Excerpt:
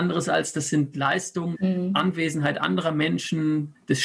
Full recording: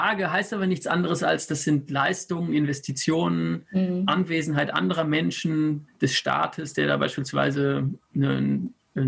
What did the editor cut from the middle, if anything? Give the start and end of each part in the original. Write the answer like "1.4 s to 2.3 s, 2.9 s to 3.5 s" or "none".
2.5 s to 3.7 s